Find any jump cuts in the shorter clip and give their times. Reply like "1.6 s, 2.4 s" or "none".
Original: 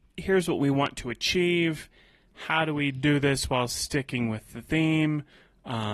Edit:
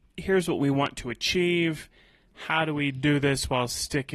none